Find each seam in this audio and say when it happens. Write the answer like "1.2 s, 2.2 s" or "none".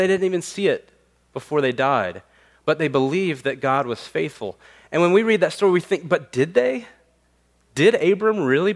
none